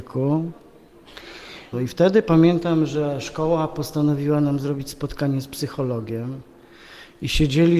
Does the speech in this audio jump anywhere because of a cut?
yes; 1 cut; at 1.7 s

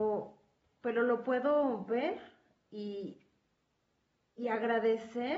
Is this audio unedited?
yes; 0 cuts

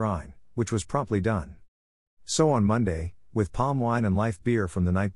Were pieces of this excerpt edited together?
yes; 2 cuts; at 2.0 s, 3.3 s

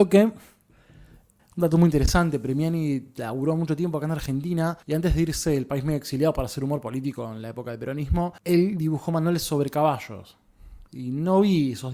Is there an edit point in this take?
yes; 3 cuts; at 1.4 s, 4.8 s, 8.4 s

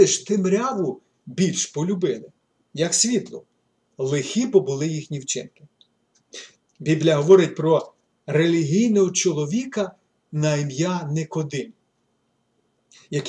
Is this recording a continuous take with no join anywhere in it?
no; 1 cut; at 6.6 s

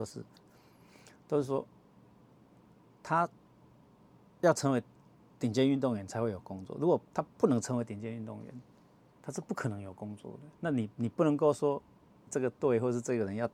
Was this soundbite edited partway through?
yes; 2 cuts; at 10.5 s, 12.3 s

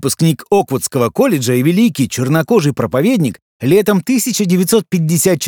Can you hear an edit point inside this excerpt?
no; 0 cuts

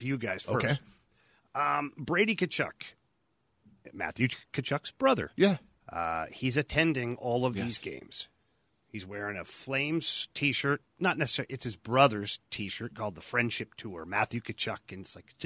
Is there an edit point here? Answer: no; 0 cuts

